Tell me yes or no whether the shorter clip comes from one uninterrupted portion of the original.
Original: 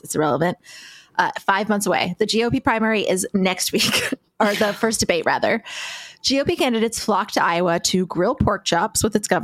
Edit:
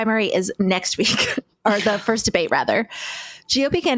yes